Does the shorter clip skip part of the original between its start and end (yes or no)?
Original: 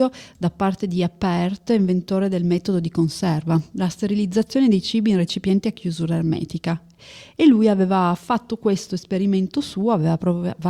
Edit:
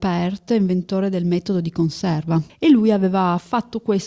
yes